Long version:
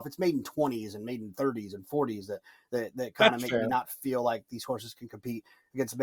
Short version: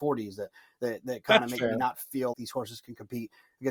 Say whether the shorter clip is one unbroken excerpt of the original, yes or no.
no